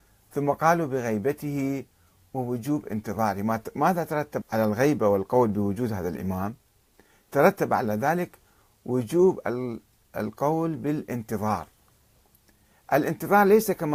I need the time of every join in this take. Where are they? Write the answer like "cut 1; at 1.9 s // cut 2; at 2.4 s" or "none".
cut 1; at 4.4 s